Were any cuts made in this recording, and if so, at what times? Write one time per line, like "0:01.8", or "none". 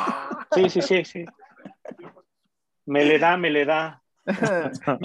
none